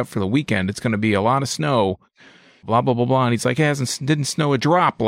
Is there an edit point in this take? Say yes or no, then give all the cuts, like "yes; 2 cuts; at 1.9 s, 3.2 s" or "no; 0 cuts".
no; 0 cuts